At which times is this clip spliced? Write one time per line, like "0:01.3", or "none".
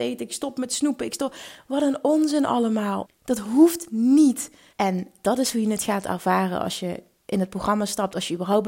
0:03.1
0:04.7